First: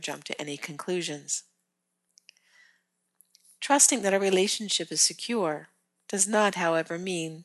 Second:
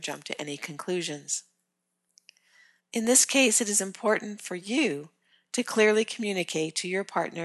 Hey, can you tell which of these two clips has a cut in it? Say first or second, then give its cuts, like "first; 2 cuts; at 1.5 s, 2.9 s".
second; 1 cut; at 2.8 s